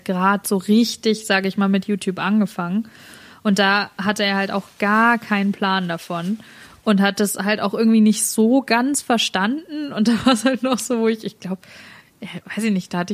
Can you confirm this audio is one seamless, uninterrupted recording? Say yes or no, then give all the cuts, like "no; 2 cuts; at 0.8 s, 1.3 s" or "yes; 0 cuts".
yes; 0 cuts